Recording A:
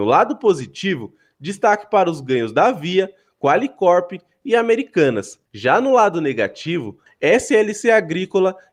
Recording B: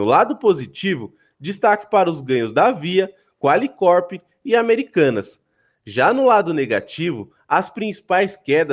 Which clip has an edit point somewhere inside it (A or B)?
A